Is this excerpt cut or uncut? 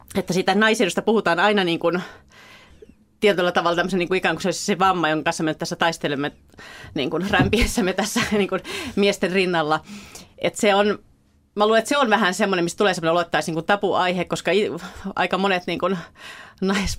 uncut